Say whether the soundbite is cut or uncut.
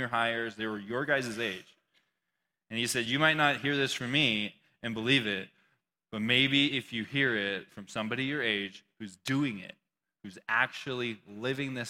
uncut